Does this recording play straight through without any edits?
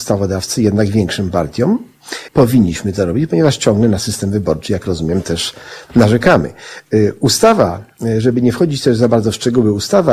no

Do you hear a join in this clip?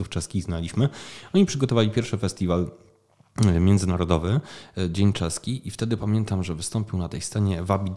no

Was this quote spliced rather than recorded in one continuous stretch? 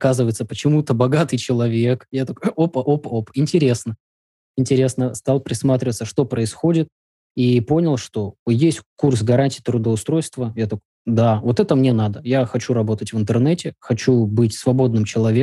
no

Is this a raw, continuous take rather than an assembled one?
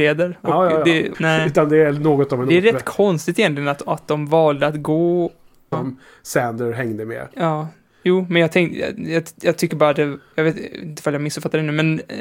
no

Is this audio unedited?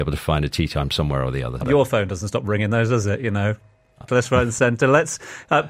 no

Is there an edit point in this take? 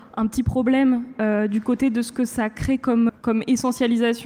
yes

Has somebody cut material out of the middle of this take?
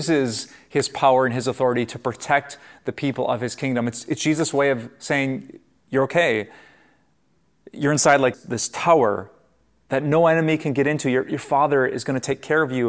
yes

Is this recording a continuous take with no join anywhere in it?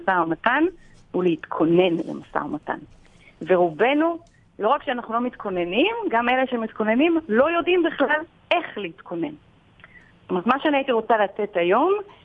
yes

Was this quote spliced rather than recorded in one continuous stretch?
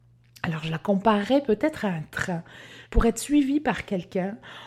yes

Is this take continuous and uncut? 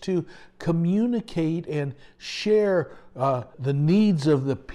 no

